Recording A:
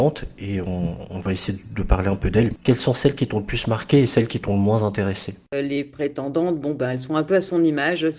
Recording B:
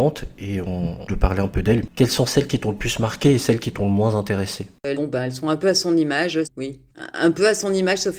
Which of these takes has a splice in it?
B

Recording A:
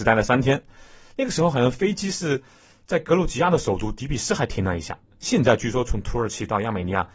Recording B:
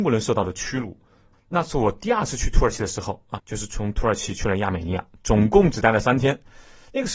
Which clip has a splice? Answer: B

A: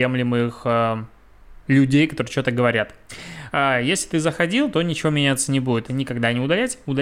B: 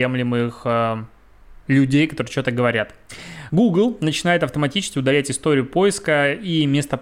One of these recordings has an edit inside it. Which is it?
A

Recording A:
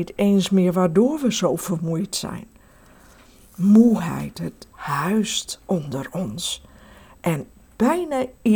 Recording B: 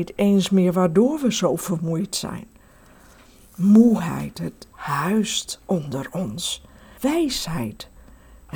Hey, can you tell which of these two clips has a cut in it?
B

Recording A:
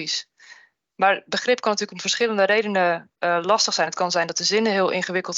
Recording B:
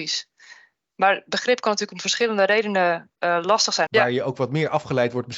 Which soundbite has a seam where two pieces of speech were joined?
B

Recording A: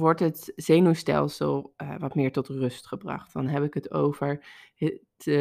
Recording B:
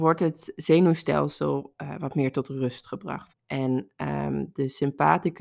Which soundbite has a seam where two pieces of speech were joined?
B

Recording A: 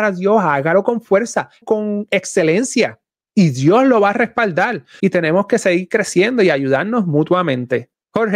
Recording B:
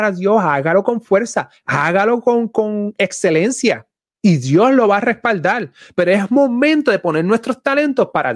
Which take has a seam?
A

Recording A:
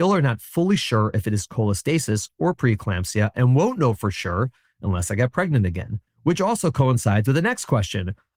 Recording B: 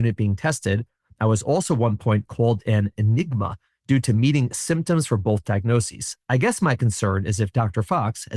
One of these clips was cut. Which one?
A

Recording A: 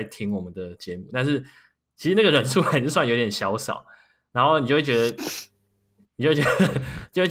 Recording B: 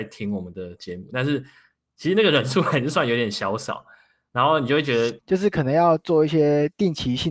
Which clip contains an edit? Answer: B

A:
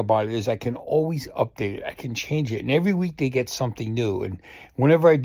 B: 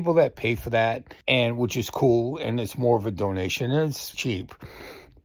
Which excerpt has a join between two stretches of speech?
B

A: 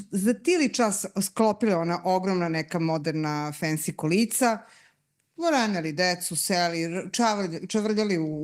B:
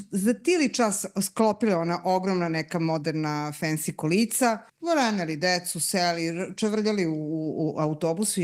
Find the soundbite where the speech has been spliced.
B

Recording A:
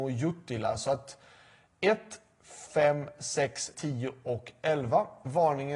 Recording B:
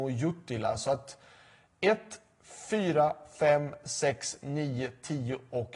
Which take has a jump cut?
A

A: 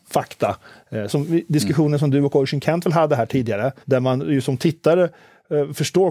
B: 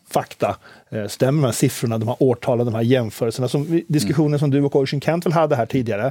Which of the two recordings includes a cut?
A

